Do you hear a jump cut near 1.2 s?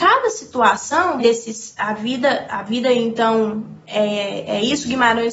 yes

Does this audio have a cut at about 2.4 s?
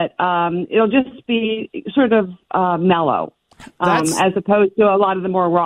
no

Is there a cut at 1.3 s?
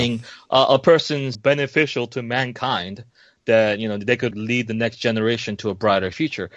yes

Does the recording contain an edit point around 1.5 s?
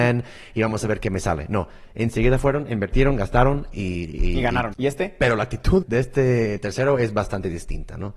no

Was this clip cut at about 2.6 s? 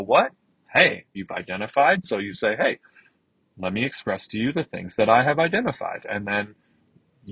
no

